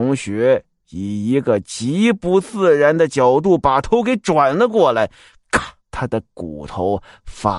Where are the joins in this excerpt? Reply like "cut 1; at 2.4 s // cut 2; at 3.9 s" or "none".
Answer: cut 1; at 5.8 s

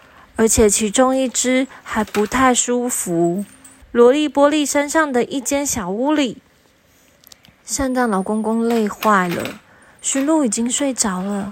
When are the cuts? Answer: cut 1; at 3.8 s

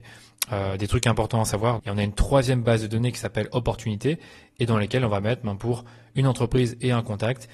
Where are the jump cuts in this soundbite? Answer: cut 1; at 1.8 s

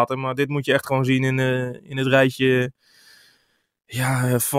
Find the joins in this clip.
none

